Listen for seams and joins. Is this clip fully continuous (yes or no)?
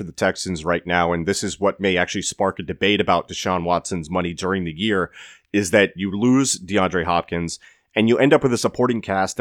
yes